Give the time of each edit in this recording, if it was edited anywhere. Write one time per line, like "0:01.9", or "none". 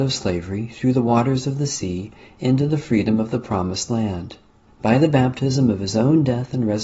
0:04.7